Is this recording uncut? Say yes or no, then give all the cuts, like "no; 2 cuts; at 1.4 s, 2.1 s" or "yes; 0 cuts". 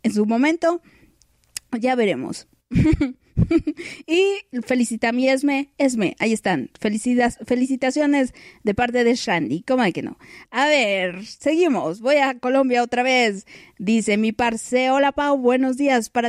yes; 0 cuts